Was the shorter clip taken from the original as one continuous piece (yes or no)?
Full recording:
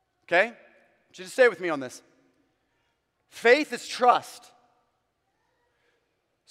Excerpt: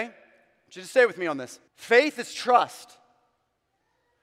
no